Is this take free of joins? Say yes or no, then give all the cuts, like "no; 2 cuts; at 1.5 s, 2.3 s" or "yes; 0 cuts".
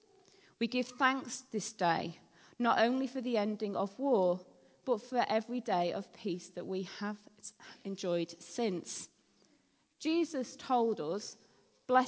yes; 0 cuts